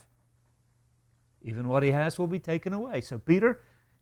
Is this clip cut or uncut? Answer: uncut